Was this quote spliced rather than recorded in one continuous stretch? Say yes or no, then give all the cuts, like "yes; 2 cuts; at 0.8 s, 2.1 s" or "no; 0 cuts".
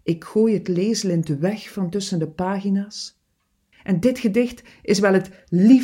yes; 1 cut; at 3.7 s